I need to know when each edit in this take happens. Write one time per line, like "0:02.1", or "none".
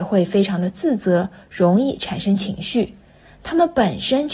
0:03.2

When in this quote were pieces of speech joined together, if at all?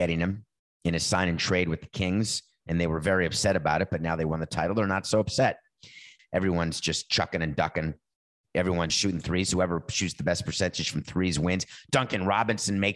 0:06.2
0:08.9

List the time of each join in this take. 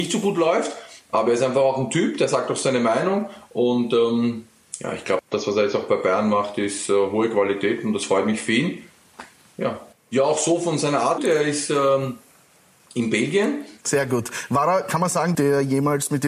0:09.9
0:11.2
0:15.3

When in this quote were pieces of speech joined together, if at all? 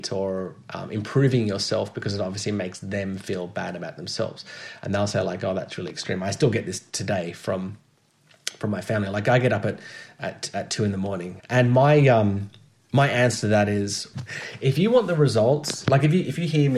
0:11.4
0:14.1

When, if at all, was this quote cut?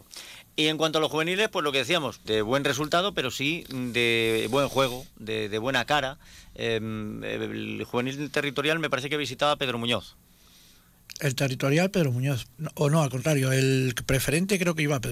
0:02.3
0:12.6

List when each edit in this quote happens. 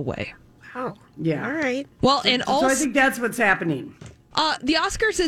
0:02.0
0:04.3

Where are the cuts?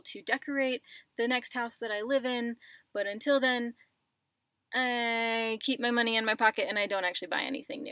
none

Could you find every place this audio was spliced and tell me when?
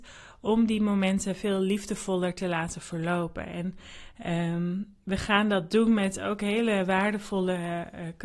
none

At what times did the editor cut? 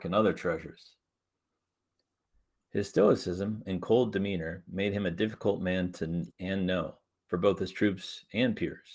0:06.3

